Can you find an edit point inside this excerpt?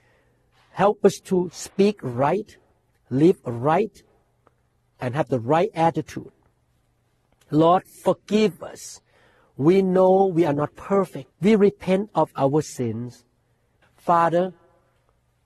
yes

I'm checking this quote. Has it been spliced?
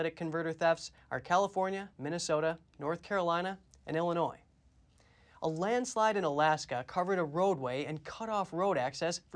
yes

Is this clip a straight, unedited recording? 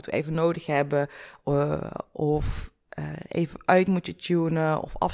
yes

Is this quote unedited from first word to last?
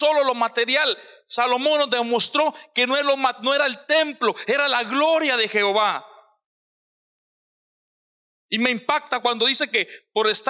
yes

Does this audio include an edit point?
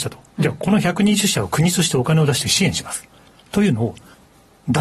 no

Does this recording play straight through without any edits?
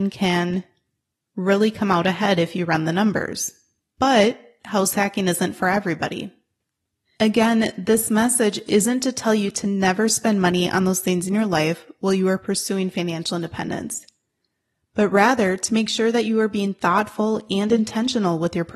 no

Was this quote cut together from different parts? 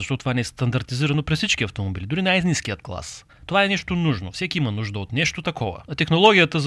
no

